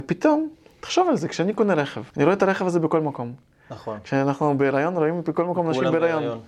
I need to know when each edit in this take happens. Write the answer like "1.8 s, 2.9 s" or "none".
2.1 s